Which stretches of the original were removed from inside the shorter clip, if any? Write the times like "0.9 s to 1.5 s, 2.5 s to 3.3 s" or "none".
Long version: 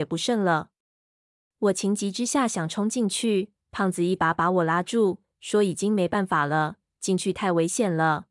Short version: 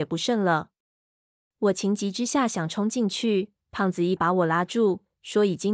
4.2 s to 4.3 s